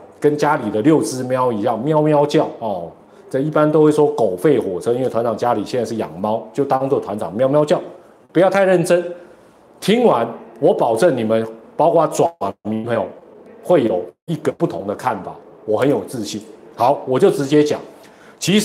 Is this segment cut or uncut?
uncut